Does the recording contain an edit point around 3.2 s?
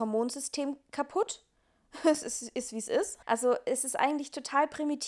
yes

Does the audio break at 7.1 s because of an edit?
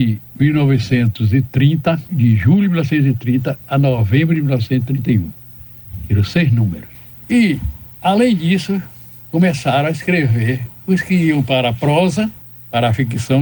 no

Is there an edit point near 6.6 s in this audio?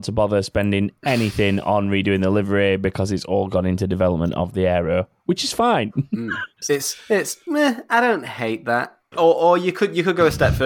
yes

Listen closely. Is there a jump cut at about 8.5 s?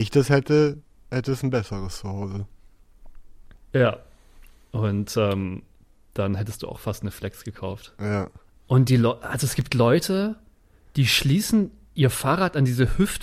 yes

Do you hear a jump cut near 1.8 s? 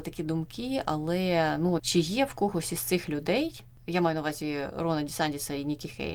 yes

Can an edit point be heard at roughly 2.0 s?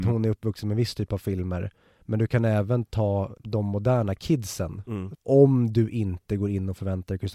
no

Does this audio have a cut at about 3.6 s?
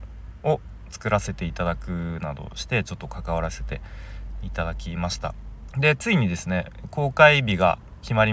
no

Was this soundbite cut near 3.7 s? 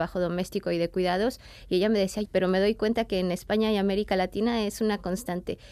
no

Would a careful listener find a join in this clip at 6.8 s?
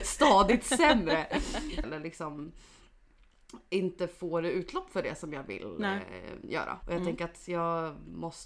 yes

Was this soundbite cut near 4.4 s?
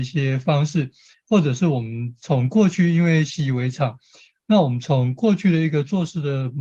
yes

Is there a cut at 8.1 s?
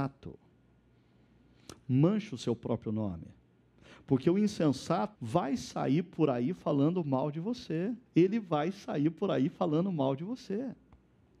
yes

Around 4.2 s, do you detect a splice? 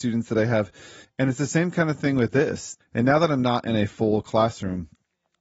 no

